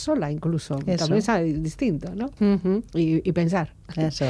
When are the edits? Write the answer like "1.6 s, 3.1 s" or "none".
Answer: 2.4 s

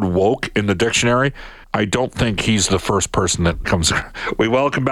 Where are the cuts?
1.6 s, 3.6 s

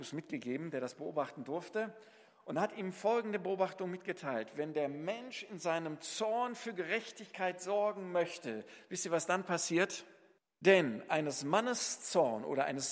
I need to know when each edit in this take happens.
10.4 s

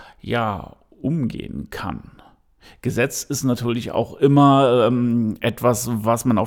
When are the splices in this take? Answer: none

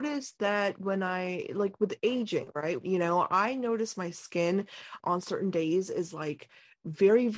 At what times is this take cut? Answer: 2.8 s, 5.0 s

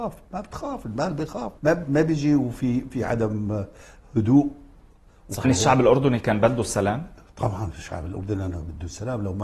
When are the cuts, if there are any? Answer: 1.6 s, 5.4 s

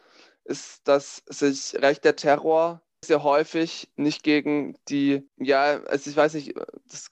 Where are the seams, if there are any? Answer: 3.0 s, 5.3 s

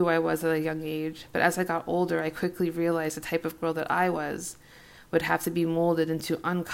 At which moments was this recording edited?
none

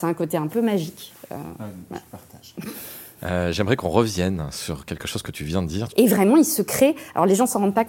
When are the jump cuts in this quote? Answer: 5.9 s

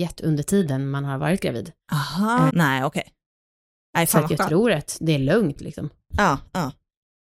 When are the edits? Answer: 2.5 s

